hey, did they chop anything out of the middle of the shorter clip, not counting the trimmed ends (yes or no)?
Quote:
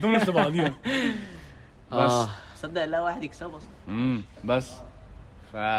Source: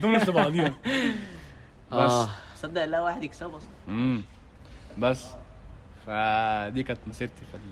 yes